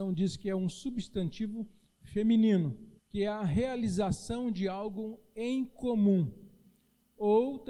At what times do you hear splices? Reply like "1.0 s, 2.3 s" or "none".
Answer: 3.0 s